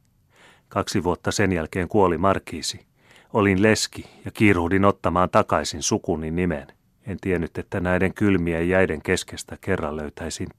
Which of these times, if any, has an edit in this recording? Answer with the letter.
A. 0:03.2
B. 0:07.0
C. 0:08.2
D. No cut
B